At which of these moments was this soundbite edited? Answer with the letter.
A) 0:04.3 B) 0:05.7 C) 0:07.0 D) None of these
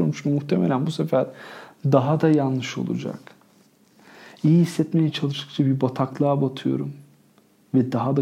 D